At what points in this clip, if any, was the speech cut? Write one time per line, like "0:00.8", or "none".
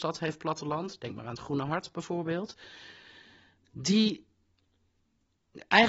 none

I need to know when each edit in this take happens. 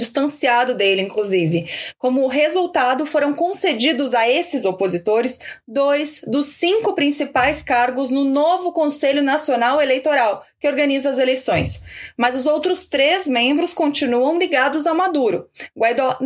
none

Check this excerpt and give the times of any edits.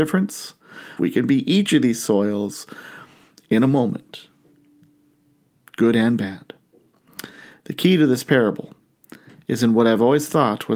0:01.0

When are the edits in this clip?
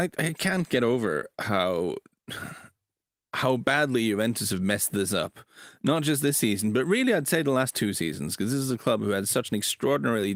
none

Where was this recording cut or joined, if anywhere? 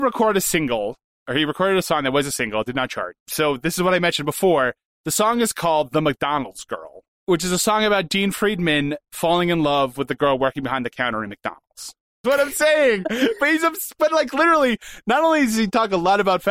0:12.2

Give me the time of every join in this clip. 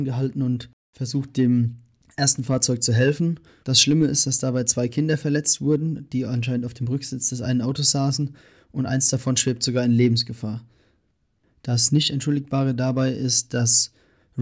0:03.6

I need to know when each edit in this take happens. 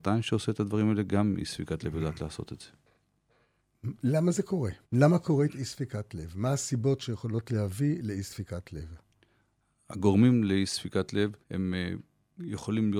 0:04.8
0:11.4

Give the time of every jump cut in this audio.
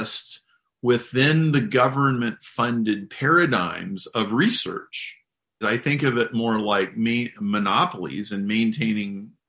0:05.6

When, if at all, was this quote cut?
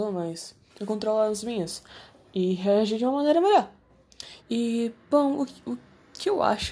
0:04.4

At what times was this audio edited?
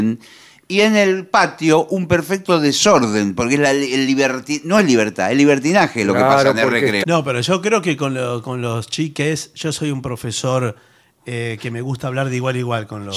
0:07.0

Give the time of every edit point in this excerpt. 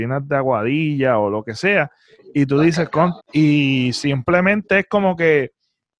0:03.2

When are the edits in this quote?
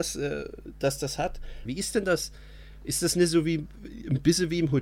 0:01.6

